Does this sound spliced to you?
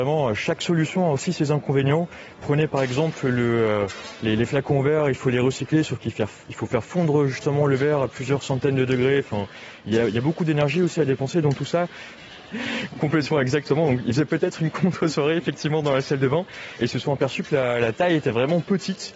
yes; 1 cut; at 12.2 s

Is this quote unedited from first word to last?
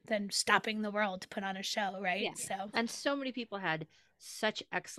yes; 0 cuts

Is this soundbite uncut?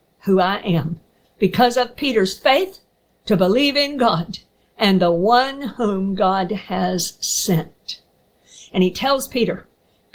no; 2 cuts; at 1.2 s, 8.7 s

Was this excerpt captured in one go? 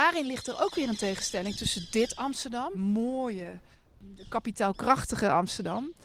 no; 1 cut; at 2.7 s

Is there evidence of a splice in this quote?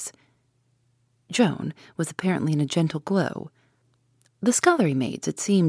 yes; 2 cuts; at 1.2 s, 4.3 s

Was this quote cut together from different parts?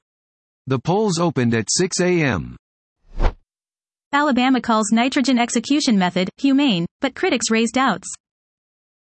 no; 0 cuts

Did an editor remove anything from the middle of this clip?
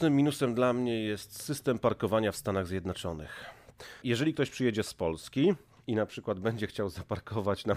yes; 1 cut; at 4.0 s

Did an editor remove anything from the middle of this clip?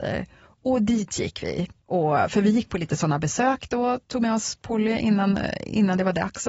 no; 0 cuts

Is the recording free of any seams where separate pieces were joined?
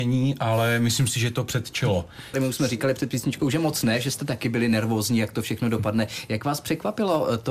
no; 1 cut; at 2.3 s

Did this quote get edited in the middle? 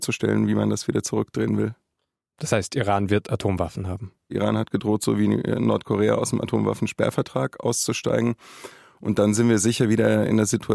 no; 0 cuts

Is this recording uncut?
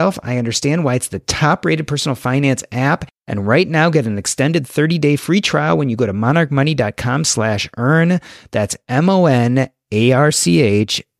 yes; 0 cuts

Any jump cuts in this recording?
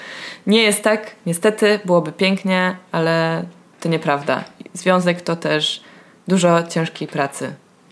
no; 0 cuts

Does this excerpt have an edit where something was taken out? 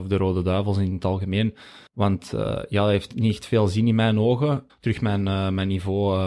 yes; 2 cuts; at 1.9 s, 4.7 s

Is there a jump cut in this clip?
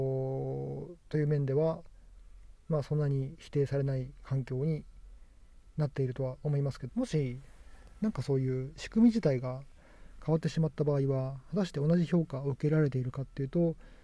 yes; 1 cut; at 6.9 s

